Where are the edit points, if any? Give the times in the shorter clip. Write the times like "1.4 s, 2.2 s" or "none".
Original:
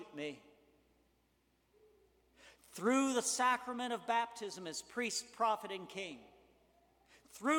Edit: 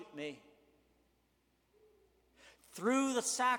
none